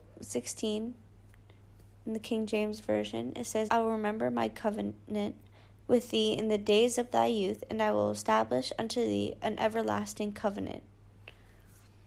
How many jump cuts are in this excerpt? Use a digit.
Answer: 2